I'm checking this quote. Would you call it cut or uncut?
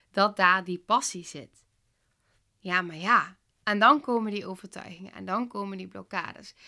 cut